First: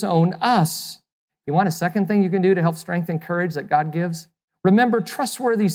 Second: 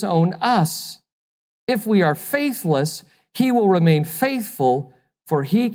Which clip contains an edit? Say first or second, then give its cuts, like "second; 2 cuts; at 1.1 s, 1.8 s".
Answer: first; 2 cuts; at 1.3 s, 4.5 s